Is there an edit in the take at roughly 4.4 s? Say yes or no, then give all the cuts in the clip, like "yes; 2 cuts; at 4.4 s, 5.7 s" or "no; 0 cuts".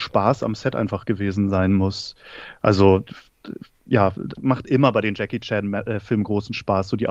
yes; 1 cut; at 4.4 s